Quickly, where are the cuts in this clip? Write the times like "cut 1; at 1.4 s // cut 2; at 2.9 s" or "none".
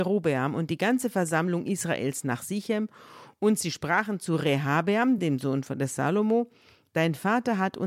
none